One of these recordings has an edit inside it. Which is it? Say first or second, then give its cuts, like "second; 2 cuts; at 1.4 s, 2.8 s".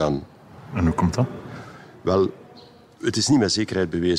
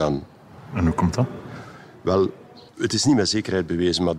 second; 1 cut; at 2.7 s